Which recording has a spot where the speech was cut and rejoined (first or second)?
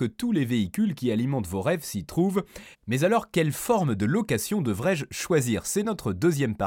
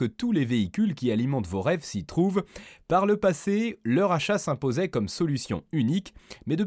first